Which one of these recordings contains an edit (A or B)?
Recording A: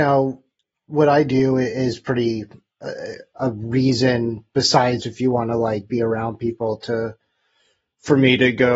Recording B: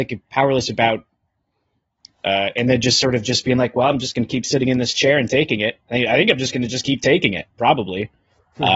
A